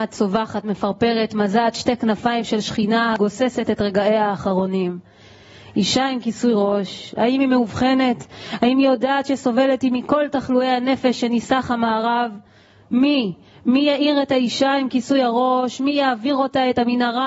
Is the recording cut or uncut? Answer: uncut